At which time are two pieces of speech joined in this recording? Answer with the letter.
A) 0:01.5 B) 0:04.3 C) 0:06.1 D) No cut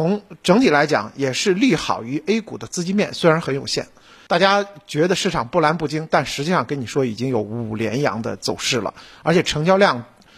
B